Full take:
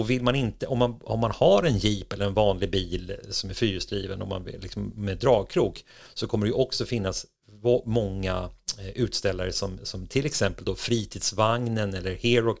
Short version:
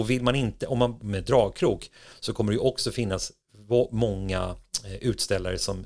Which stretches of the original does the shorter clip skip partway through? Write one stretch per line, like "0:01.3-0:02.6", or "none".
0:01.0-0:04.9